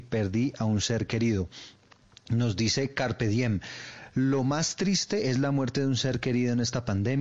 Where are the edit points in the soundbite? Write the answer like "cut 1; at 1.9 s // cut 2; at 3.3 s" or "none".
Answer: none